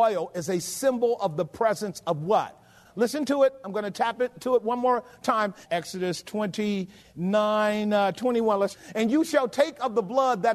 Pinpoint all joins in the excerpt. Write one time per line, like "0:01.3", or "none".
0:02.8